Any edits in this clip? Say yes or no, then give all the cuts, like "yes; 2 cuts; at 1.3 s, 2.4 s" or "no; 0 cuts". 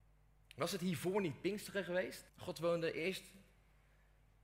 yes; 1 cut; at 2.3 s